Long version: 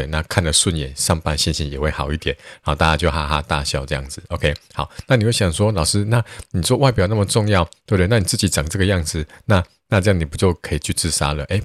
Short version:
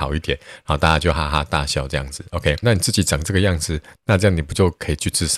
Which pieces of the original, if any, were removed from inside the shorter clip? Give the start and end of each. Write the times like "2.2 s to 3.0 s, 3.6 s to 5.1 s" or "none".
4.6 s to 8.1 s, 9.4 s to 9.8 s